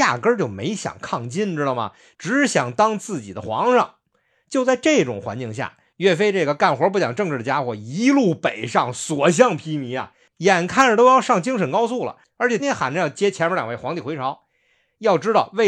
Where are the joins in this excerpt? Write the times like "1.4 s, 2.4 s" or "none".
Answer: 12.6 s